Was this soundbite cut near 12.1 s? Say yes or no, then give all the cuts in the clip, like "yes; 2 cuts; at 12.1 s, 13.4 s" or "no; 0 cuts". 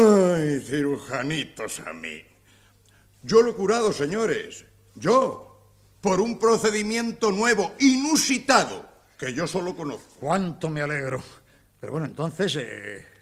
no; 1 cut; at 5.9 s